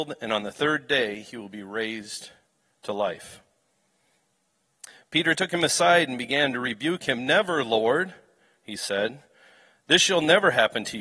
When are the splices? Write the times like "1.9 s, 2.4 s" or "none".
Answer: none